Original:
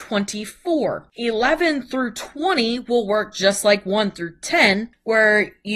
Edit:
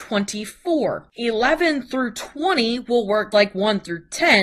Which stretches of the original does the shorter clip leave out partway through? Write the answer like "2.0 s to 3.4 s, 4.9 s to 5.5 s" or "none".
3.3 s to 3.6 s